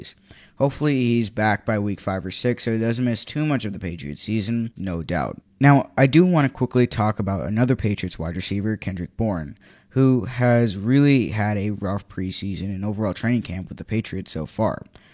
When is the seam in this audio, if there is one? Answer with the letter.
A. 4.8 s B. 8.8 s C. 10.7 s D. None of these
A